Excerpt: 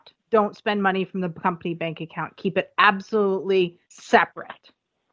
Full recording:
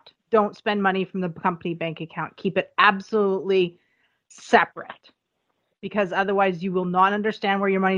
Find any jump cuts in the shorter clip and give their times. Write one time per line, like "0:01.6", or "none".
0:03.8